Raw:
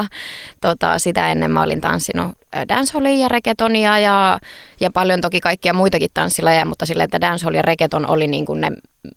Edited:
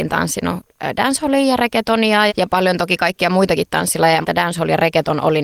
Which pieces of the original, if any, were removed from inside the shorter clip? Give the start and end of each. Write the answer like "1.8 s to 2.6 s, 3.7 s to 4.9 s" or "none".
4.0 s to 4.7 s, 6.7 s to 7.1 s